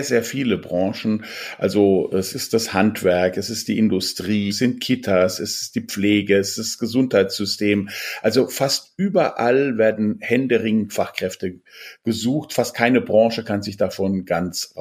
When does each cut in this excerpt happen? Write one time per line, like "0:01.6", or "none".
0:04.5